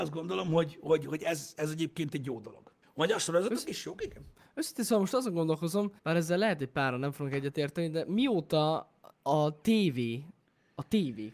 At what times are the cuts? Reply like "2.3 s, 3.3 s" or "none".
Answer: 2.8 s, 6.0 s

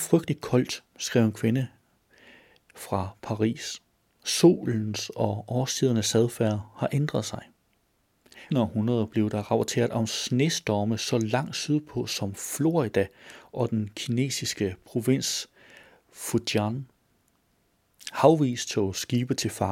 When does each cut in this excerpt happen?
8.5 s

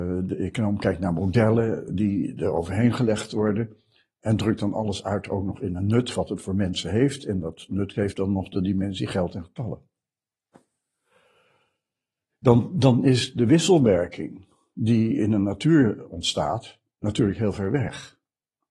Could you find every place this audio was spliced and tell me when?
none

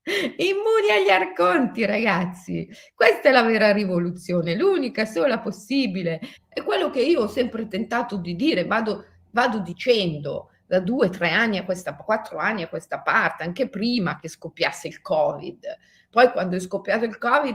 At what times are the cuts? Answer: 6.4 s

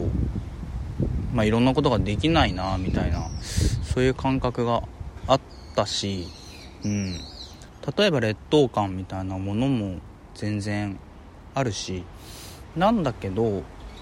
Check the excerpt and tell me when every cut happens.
12.7 s

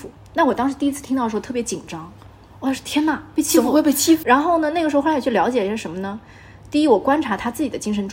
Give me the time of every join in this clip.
4.2 s

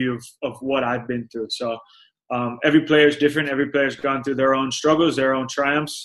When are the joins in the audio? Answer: none

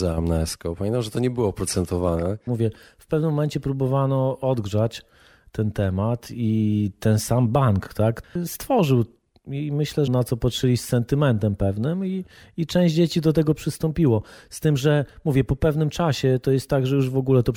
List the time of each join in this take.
2.5 s, 10.1 s

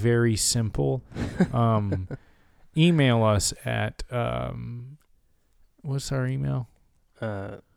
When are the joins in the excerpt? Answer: none

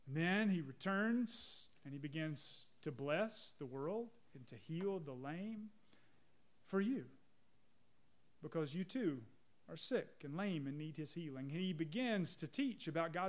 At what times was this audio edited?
4.3 s

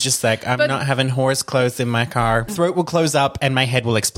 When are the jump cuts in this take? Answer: 2.5 s

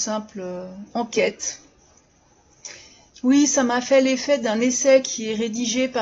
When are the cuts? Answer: 3.1 s

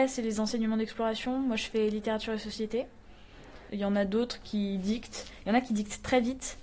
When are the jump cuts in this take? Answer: 3.7 s

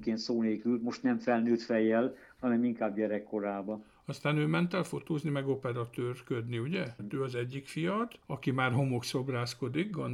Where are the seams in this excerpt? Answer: 7.0 s, 8.2 s

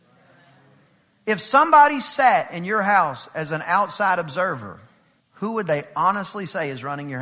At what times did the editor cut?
5.2 s

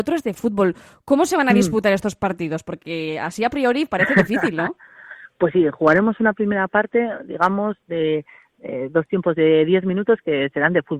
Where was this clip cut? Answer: none

